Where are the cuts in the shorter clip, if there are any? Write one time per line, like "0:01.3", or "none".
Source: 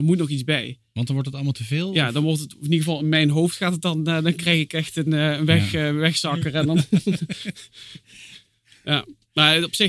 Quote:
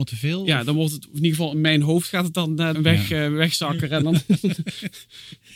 0:02.7